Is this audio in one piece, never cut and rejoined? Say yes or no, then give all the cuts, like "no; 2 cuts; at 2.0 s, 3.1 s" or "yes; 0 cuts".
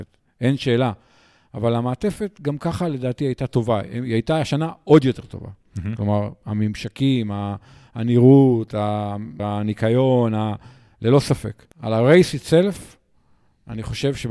no; 2 cuts; at 9.4 s, 11.7 s